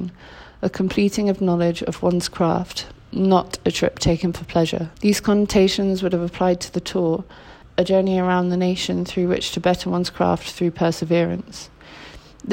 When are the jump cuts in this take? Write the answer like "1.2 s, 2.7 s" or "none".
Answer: 4.9 s